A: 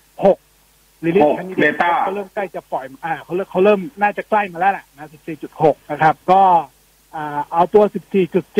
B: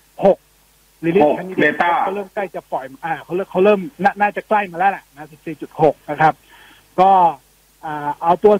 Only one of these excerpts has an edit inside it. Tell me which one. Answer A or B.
A